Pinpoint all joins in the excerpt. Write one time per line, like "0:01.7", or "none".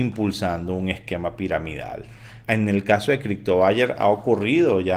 0:02.4